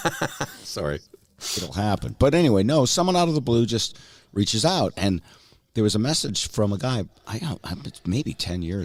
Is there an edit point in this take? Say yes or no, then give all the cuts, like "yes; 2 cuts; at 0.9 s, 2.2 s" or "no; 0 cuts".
no; 0 cuts